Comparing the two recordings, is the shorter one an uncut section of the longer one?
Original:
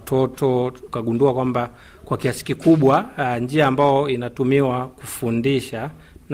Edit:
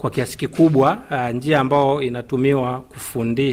yes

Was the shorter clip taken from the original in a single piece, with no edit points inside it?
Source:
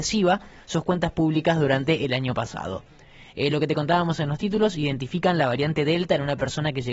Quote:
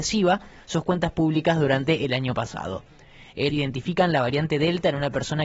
no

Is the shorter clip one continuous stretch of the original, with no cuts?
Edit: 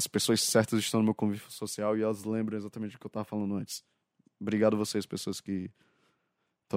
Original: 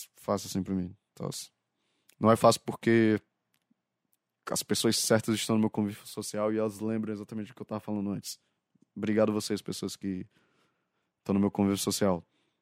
yes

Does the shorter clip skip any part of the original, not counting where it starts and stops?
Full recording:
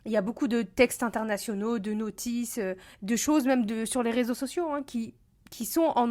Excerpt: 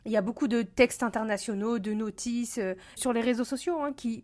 yes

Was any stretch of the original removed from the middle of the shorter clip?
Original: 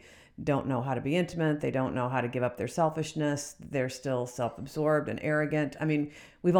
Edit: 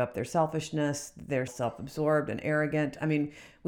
yes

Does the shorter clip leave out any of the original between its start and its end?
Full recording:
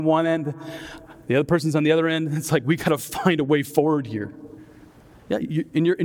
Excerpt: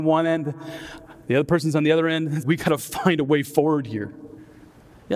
yes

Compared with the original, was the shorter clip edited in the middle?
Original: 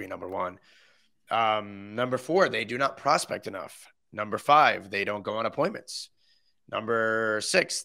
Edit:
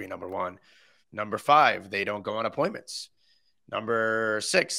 yes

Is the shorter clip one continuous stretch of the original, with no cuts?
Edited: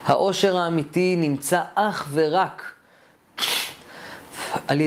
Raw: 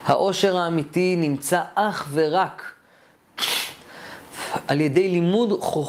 yes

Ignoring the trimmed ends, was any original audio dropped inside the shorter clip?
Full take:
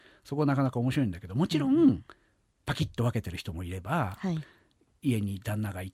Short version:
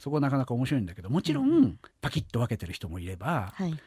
yes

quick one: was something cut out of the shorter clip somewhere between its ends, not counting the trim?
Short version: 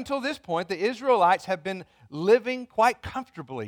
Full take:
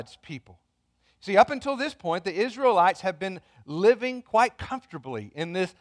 no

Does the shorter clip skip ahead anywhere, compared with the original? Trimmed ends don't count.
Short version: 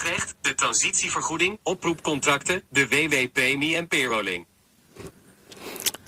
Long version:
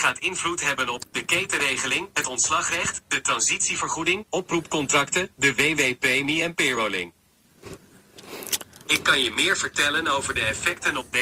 no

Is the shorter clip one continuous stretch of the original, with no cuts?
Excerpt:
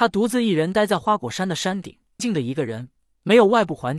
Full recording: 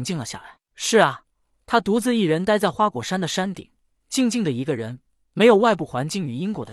no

